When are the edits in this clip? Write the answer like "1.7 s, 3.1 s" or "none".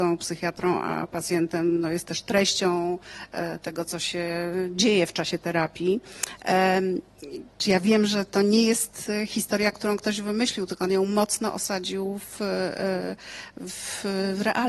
7.6 s